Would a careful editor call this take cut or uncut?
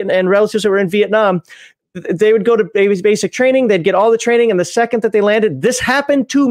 uncut